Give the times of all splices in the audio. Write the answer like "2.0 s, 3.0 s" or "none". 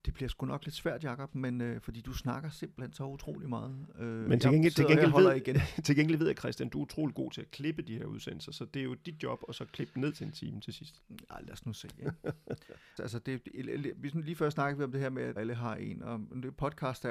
13.0 s, 15.4 s